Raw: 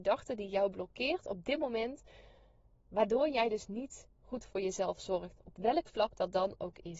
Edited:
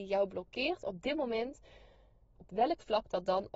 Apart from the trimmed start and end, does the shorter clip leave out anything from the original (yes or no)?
yes